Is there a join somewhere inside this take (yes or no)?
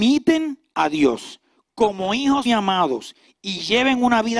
yes